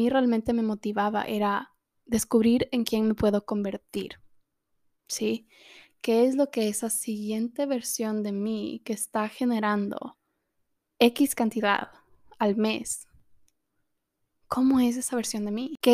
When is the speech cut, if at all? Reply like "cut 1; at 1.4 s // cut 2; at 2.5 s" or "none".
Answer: none